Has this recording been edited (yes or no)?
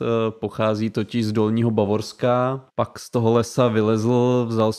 yes